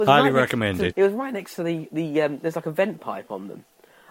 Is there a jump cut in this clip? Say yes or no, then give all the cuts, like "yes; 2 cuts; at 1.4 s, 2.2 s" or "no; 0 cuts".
yes; 1 cut; at 0.9 s